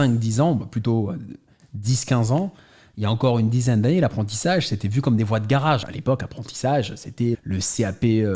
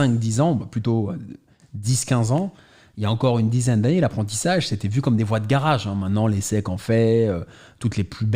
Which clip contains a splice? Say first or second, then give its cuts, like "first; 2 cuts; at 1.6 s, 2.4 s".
first; 2 cuts; at 5.8 s, 7.3 s